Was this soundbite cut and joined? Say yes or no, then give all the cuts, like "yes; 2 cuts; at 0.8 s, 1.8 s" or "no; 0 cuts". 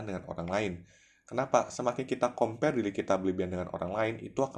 no; 0 cuts